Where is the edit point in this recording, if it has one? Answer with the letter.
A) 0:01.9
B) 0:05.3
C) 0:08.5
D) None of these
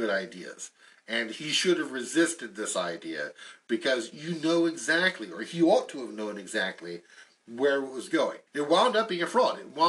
C